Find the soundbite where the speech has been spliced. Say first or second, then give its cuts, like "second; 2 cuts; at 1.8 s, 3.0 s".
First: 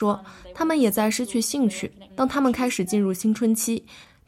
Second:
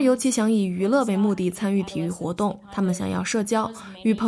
first; 1 cut; at 2.1 s